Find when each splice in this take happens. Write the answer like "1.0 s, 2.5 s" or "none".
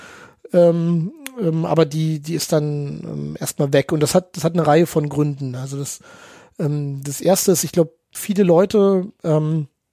8.1 s